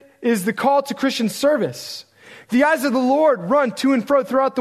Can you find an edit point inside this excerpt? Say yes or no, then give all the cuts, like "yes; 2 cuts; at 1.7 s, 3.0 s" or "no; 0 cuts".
yes; 1 cut; at 2.5 s